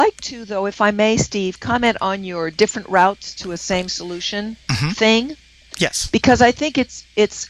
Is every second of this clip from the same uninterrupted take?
yes; 0 cuts

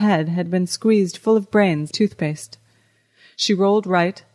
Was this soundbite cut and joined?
yes; 1 cut; at 1.9 s

